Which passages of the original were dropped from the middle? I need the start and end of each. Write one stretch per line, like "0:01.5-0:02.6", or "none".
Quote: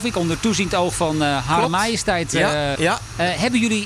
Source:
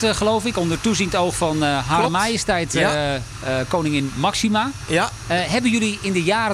0:03.2-0:04.9